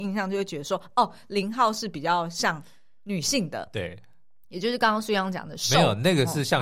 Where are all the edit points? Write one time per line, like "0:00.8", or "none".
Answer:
none